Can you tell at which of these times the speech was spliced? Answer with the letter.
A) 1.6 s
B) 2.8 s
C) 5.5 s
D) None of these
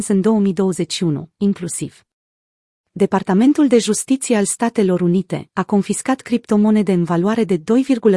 C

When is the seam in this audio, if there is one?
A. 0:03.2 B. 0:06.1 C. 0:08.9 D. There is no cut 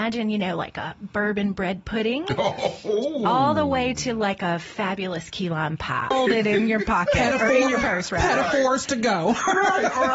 B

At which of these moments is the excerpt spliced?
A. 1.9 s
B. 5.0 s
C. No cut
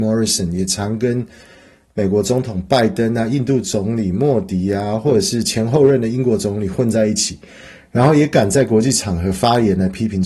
C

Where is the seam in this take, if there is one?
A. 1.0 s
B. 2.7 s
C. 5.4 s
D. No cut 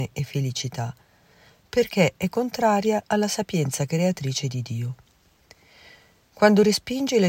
D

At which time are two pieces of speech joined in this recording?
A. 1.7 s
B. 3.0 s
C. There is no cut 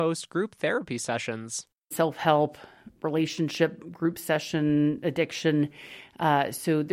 B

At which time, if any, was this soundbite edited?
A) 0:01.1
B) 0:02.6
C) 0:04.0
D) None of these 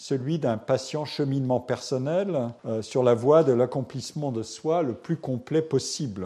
B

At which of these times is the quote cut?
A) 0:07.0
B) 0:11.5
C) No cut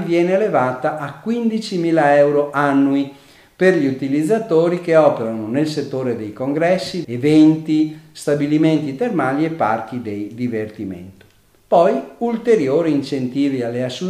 A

